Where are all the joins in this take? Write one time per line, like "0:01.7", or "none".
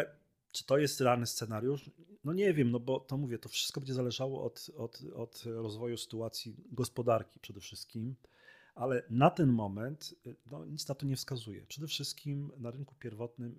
none